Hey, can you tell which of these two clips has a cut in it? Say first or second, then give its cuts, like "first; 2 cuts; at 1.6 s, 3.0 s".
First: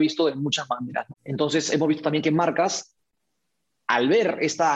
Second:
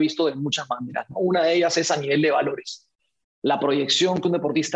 first; 1 cut; at 1.1 s